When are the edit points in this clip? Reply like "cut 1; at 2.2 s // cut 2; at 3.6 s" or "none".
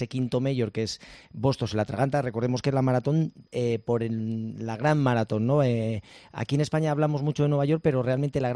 none